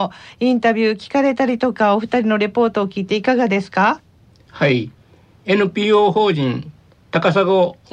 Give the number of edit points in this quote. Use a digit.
0